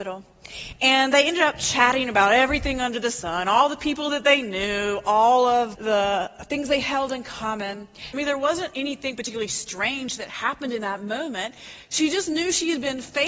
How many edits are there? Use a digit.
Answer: 2